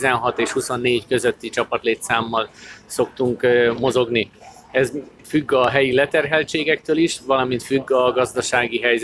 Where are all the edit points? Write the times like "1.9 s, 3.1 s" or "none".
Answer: none